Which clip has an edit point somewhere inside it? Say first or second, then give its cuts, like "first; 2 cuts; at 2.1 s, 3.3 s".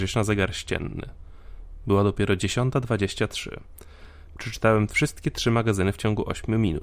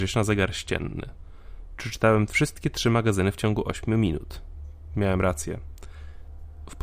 second; 2 cuts; at 1.8 s, 4.9 s